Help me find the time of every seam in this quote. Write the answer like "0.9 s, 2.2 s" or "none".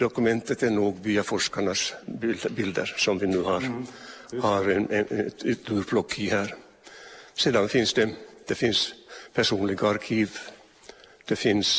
none